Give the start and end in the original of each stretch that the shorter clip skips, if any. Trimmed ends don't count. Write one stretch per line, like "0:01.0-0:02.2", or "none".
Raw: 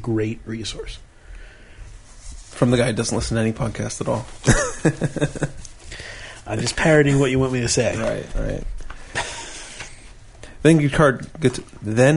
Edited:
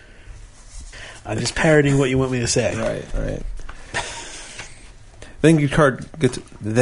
0:02.4-0:06.1